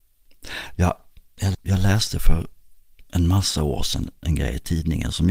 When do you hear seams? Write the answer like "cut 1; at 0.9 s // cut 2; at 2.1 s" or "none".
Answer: cut 1; at 1.5 s